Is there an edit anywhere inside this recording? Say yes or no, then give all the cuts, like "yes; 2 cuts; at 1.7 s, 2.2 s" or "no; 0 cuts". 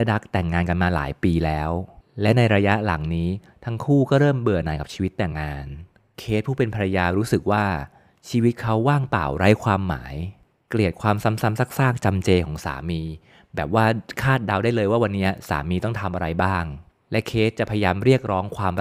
yes; 1 cut; at 5.3 s